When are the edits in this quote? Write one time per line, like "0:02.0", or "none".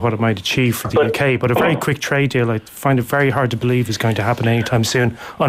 none